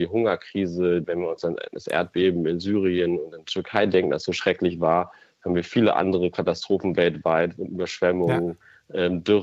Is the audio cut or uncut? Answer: cut